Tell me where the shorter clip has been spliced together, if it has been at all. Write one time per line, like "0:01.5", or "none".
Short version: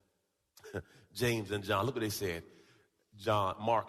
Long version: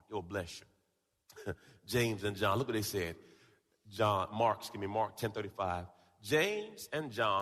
none